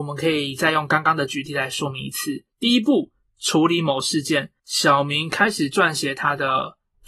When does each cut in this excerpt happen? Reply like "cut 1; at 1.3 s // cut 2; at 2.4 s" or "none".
cut 1; at 2.5 s // cut 2; at 4.6 s